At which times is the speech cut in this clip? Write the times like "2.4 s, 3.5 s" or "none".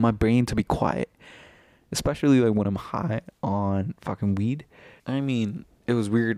5.0 s